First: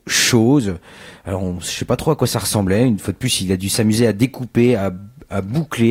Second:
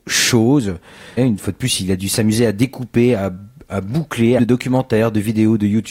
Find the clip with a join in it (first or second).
second